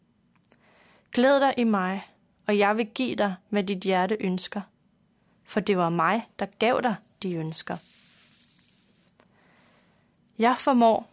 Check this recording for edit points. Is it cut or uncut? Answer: uncut